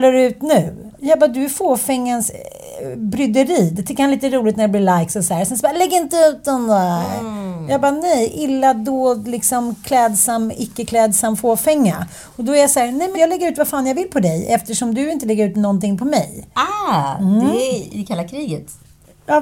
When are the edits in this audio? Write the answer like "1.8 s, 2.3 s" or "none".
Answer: 13.1 s